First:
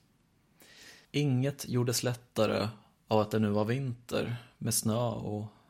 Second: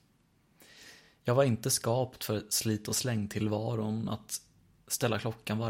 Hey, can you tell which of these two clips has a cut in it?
first; 1 cut; at 1.0 s

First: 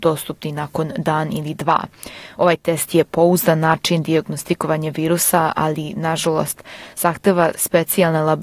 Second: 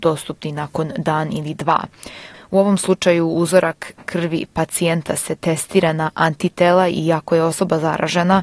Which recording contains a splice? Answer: second; 1 cut; at 2.3 s

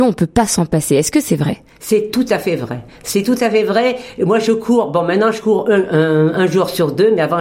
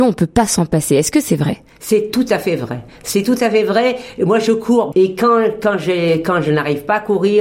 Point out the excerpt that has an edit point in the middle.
second; 1 cut; at 4.9 s

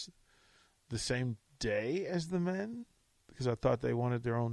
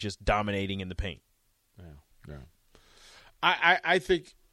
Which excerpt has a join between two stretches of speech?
second; 1 cut; at 2.1 s

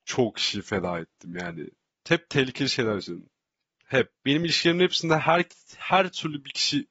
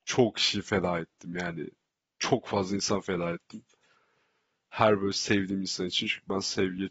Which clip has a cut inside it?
first; 1 cut; at 1.9 s

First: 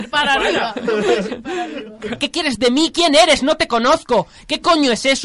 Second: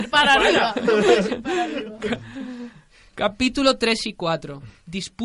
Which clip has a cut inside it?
first; 1 cut; at 2.2 s

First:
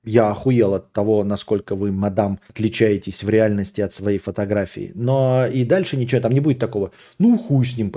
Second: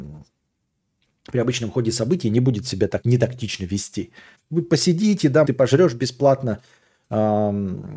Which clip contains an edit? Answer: second; 3 cuts; at 3.0 s, 4.3 s, 5.4 s

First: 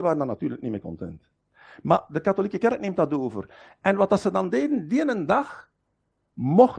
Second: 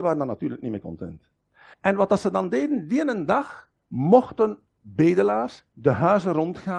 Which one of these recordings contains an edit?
second; 2 cuts; at 1.7 s, 3.8 s

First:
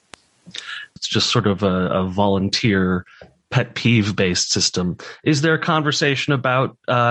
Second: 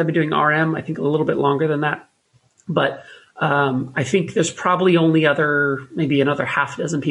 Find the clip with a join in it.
first; 1 cut; at 1.0 s

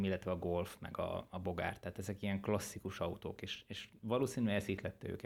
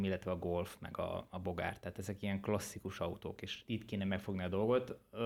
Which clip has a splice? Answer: second; 1 cut; at 3.6 s

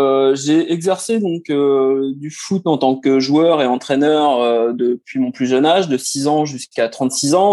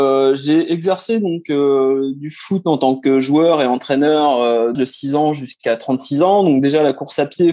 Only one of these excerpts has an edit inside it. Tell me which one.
second; 1 cut; at 4.7 s

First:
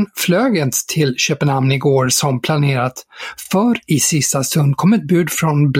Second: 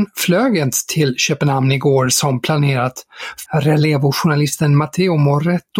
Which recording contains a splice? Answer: second; 1 cut; at 3.5 s

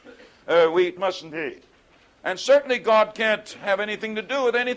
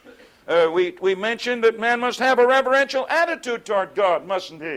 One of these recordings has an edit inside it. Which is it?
first; 1 cut; at 1.0 s

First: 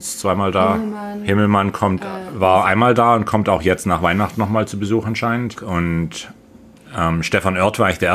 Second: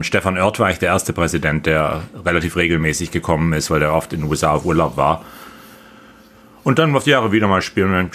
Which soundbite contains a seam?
first; 1 cut; at 5.6 s

